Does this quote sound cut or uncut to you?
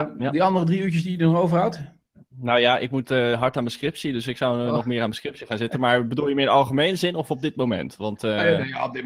uncut